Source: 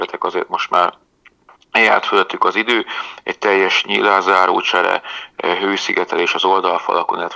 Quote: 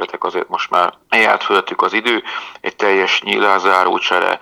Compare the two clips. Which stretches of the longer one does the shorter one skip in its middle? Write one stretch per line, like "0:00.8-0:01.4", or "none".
0:01.0-0:01.6